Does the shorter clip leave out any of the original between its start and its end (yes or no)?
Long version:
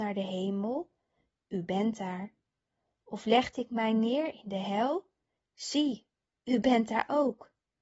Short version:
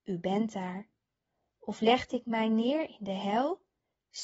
no